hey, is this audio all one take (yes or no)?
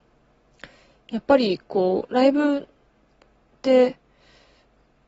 yes